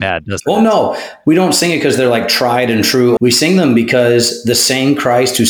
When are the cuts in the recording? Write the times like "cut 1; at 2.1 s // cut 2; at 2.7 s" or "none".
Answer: cut 1; at 3.2 s